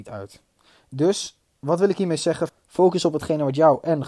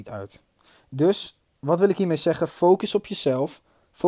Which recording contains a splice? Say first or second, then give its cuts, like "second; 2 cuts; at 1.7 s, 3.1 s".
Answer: first; 1 cut; at 2.5 s